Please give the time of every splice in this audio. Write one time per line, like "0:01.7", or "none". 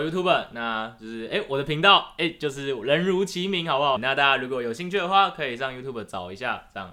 0:04.0